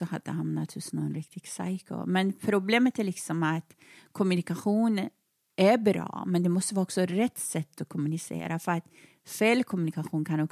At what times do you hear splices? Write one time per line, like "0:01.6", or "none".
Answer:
none